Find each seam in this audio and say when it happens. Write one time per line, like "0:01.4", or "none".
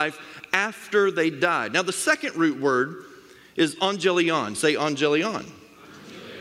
none